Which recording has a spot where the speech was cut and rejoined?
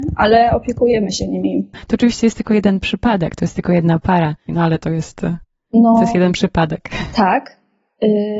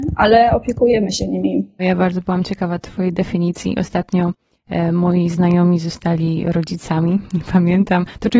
first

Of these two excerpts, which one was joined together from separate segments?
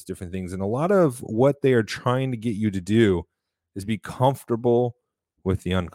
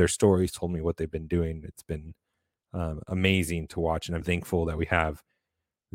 second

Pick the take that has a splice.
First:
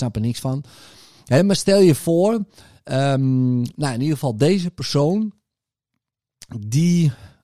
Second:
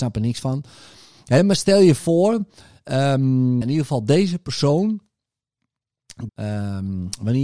second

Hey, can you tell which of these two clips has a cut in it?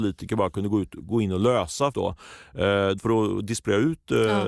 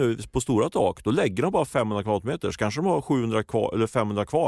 first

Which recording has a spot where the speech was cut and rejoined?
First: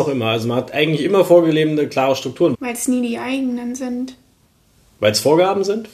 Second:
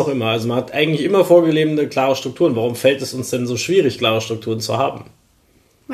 first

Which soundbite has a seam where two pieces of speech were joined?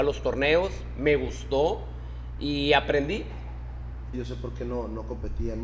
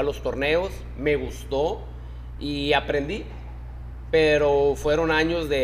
first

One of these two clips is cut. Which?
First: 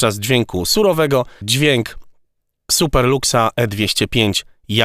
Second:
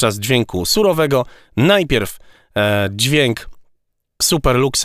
first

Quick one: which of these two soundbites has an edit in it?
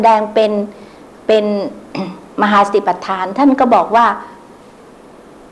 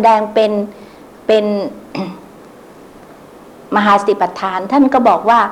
first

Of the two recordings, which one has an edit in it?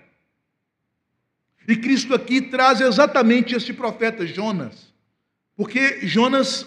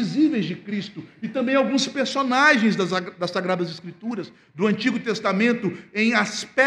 first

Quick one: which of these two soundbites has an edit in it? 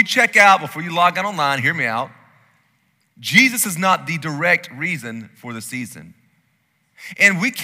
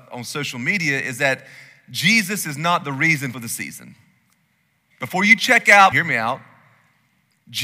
second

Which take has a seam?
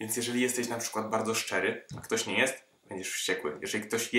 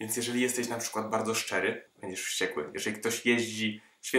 second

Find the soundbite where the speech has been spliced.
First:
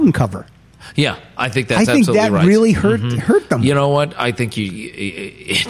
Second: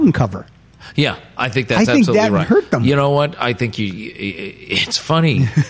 second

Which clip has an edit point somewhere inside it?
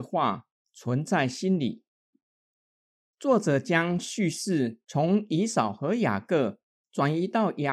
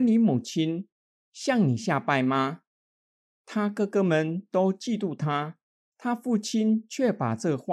second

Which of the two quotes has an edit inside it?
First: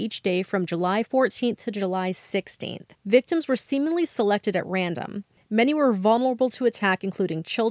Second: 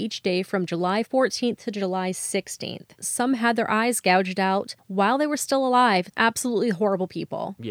second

